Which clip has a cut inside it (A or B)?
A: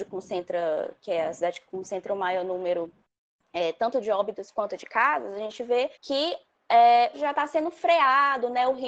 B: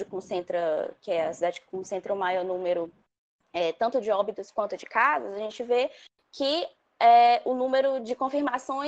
A